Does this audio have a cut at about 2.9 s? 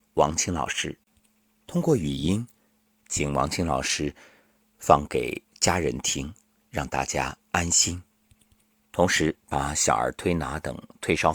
no; 0 cuts

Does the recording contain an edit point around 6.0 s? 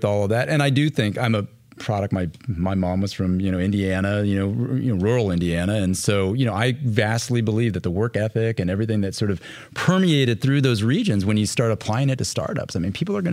no; 0 cuts

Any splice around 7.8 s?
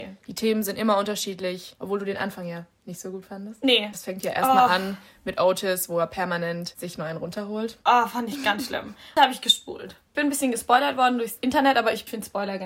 no; 1 cut; at 3.9 s

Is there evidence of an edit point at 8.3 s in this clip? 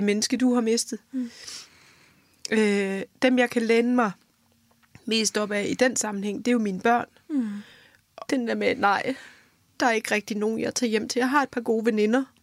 yes; 1 cut; at 8.3 s

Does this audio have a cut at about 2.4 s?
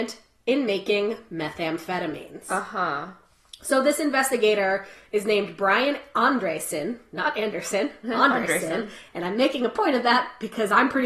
no; 0 cuts

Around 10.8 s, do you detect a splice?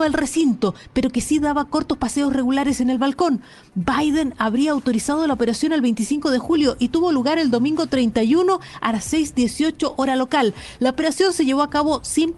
no; 0 cuts

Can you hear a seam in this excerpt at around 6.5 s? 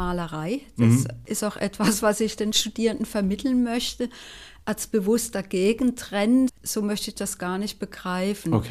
yes; 1 cut; at 6.5 s

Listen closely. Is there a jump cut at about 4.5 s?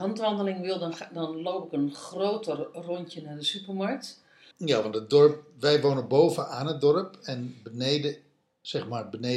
yes; 1 cut; at 4.5 s

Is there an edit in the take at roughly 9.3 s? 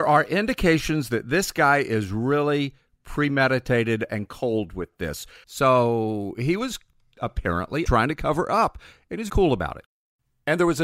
yes; 2 cuts; at 5.4 s, 9.3 s

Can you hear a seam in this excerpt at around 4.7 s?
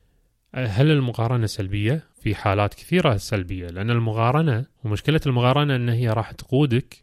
yes; 2 cuts; at 2.1 s, 4.7 s

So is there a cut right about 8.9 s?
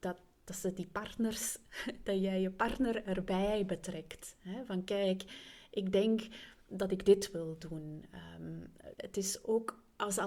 yes; 1 cut; at 8.9 s

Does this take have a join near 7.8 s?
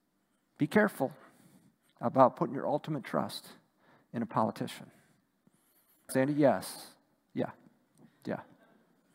no; 1 cut; at 6.1 s

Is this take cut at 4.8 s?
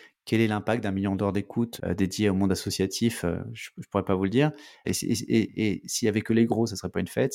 yes; 2 cuts; at 1.8 s, 4.8 s

